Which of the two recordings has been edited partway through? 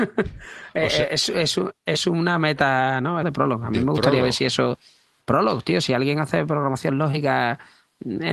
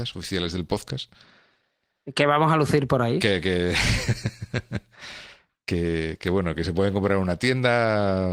first; 1 cut; at 3.2 s

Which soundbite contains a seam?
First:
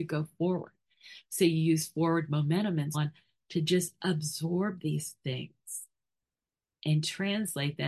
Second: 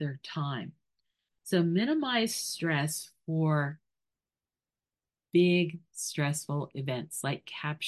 first; 1 cut; at 2.9 s

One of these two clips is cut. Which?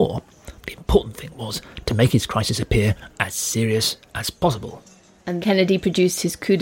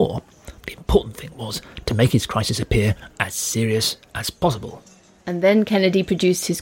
first; 1 cut; at 5.4 s

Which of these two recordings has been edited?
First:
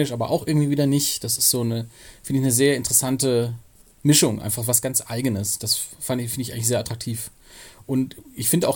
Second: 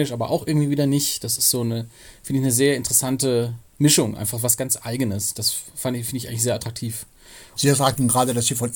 second; 2 cuts; at 3.7 s, 7.6 s

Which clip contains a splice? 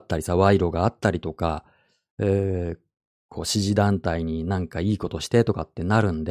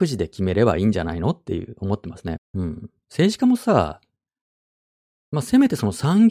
second; 1 cut; at 2.4 s

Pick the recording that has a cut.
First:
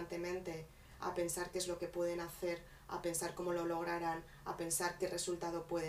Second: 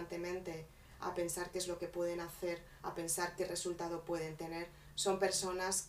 second; 1 cut; at 2.8 s

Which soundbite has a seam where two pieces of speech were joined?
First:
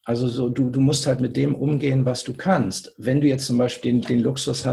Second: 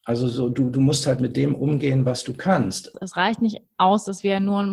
second; 1 cut; at 2.9 s

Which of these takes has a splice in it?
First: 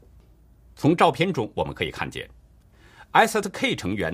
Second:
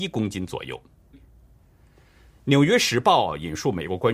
second; 1 cut; at 1.1 s

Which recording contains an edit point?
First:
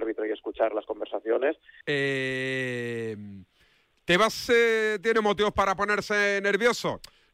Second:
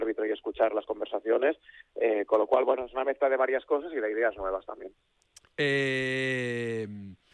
first; 1 cut; at 1.8 s

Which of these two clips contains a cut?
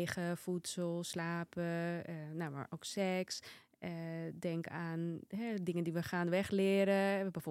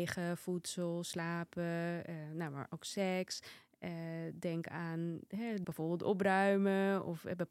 second; 1 cut; at 5.6 s

